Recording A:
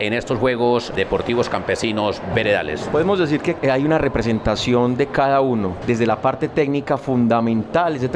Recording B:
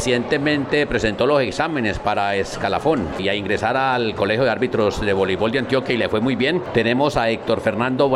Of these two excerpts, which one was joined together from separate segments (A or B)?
A